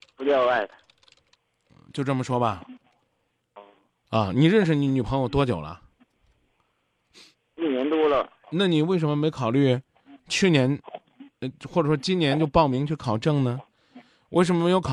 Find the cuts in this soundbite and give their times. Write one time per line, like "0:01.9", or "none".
0:08.4